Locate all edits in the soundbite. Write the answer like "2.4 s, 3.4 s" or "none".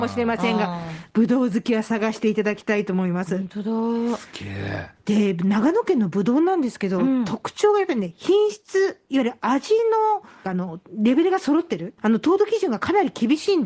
10.4 s, 12.0 s